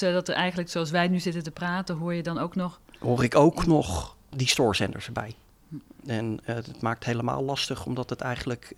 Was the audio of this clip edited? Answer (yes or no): yes